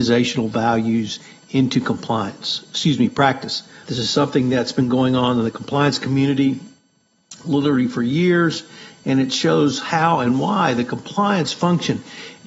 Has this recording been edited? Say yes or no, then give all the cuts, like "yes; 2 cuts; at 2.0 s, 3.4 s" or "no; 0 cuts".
yes; 1 cut; at 3.8 s